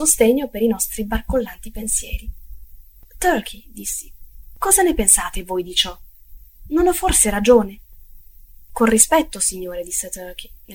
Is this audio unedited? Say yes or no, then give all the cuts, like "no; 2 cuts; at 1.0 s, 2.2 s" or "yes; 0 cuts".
yes; 0 cuts